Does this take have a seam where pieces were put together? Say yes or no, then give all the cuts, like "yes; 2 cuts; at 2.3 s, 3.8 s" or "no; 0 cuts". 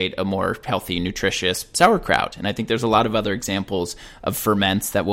no; 0 cuts